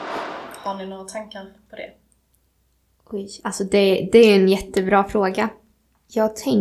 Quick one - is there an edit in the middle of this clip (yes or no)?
no